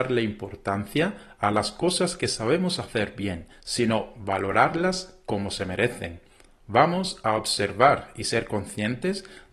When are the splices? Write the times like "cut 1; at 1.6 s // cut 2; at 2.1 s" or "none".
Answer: none